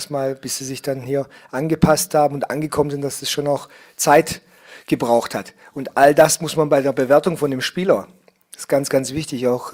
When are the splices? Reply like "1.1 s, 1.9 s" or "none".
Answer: none

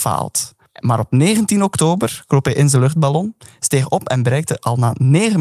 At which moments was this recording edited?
none

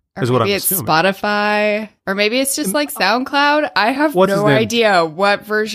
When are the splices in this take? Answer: 2.0 s

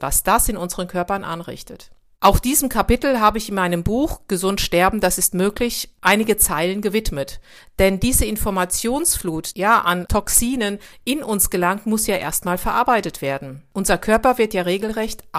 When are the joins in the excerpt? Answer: 9.5 s

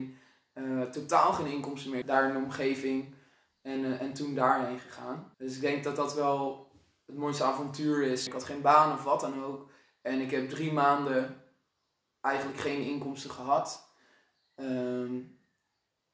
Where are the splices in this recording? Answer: 2.0 s, 5.3 s, 8.3 s

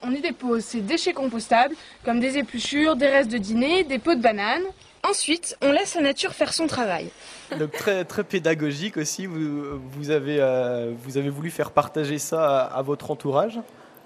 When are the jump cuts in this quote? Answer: 7.5 s

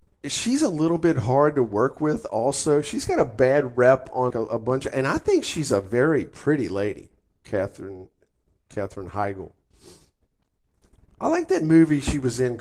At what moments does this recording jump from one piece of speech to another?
4.3 s

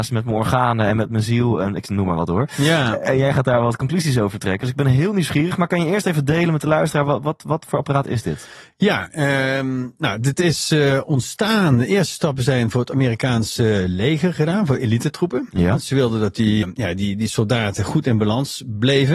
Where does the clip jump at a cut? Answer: 16.6 s

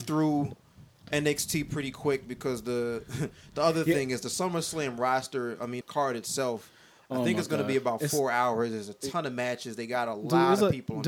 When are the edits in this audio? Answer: 5.8 s

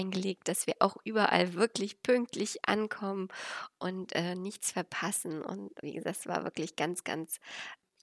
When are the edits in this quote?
5.8 s

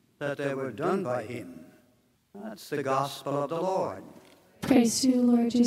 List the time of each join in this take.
none

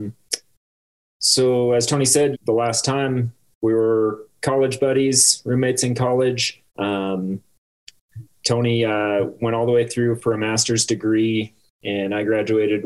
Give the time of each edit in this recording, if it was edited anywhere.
2.3 s, 6.7 s

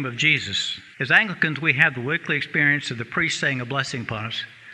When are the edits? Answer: 0.9 s

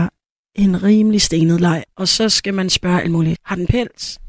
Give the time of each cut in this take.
1.9 s, 3.4 s

